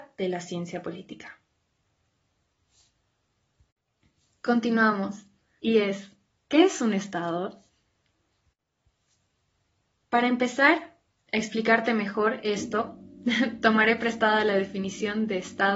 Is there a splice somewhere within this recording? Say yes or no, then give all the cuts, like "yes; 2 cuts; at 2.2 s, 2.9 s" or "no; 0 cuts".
yes; 1 cut; at 5.6 s